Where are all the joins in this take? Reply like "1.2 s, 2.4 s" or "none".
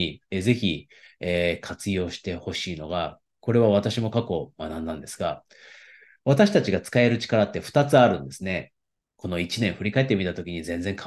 9.0 s